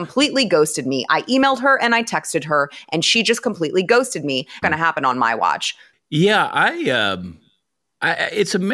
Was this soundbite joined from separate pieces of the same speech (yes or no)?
yes